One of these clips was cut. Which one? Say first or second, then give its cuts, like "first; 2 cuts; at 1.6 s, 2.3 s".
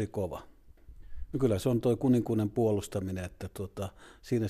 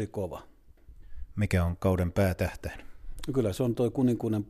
first; 1 cut; at 1.3 s